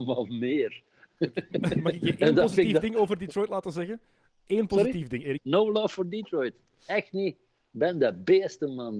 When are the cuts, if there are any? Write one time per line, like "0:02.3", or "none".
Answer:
0:05.4